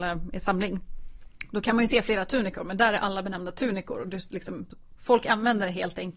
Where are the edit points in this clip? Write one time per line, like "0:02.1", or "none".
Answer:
0:05.0